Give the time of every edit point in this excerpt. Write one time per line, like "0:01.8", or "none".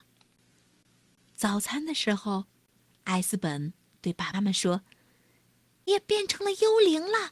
0:04.3
0:05.9